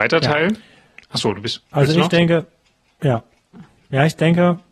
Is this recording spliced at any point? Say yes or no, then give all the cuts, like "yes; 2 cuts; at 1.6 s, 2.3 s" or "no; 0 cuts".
no; 0 cuts